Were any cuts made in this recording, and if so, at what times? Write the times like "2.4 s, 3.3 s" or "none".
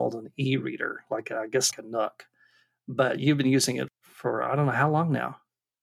1.7 s, 3.9 s